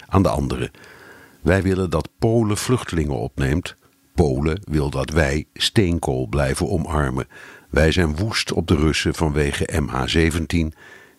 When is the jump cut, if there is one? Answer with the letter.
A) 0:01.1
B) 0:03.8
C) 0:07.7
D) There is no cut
D